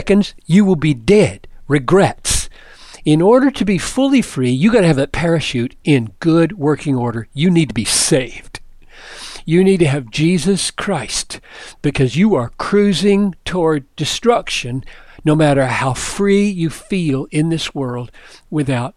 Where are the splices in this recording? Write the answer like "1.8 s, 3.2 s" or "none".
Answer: none